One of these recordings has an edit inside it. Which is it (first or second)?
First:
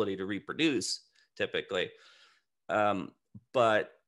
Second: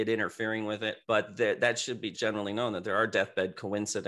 second